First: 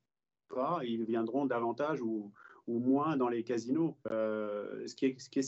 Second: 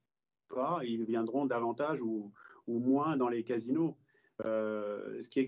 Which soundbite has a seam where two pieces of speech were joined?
first; 1 cut; at 4.0 s

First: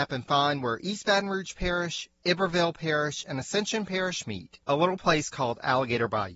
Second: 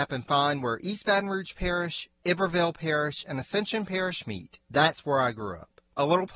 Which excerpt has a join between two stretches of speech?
first; 1 cut; at 4.6 s

